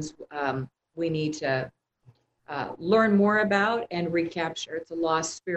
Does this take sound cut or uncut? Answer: uncut